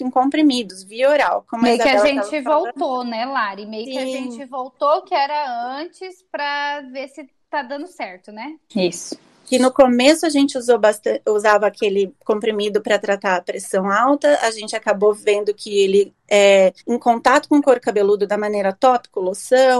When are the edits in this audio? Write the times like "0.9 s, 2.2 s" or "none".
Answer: 8.7 s, 16.8 s